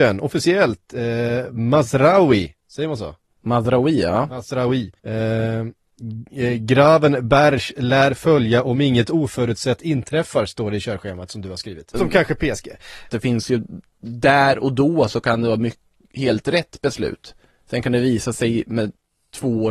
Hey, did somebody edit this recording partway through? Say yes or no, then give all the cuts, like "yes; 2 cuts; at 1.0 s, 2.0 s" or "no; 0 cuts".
yes; 3 cuts; at 5.0 s, 11.9 s, 13.1 s